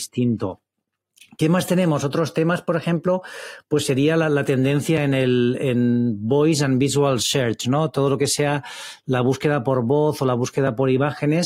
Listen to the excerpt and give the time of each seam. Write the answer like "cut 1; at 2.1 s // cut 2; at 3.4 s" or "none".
none